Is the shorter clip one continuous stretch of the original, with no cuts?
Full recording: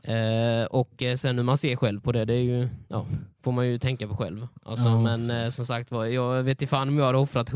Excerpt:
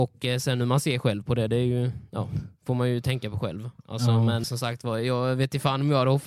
no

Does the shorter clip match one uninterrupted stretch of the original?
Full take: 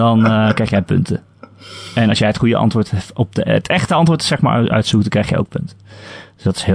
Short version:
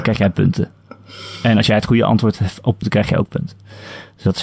no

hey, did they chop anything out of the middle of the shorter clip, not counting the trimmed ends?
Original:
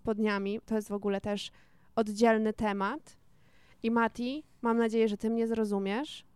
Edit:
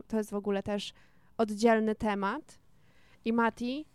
no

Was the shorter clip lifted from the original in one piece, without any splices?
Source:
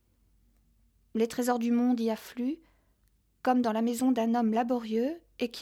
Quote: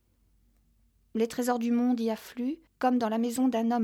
no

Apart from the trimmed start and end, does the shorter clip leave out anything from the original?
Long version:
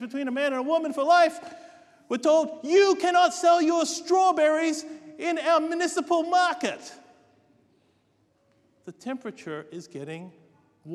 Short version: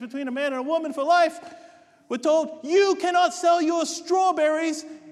no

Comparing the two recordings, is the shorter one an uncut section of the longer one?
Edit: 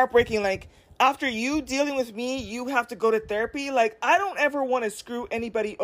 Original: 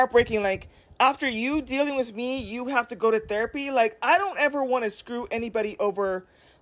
yes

